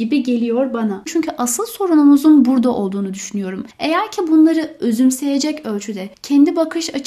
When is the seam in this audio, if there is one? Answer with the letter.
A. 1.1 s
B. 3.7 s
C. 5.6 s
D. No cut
A